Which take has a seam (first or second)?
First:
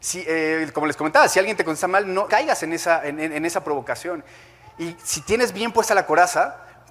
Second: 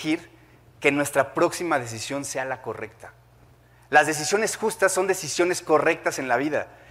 first